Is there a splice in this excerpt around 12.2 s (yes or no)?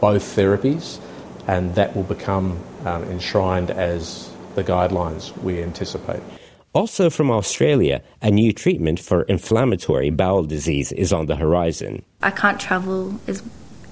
yes